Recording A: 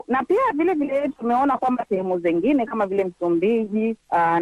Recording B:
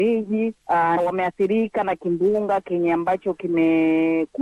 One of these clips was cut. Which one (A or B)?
B